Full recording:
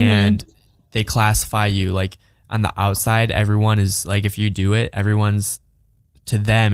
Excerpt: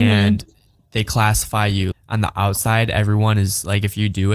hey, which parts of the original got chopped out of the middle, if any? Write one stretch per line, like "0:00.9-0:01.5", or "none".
0:01.9-0:02.3